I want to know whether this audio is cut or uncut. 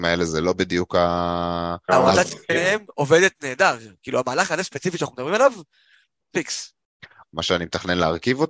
cut